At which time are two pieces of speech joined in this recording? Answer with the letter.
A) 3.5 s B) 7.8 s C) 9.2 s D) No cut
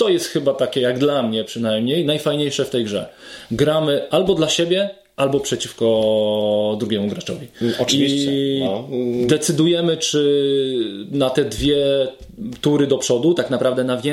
D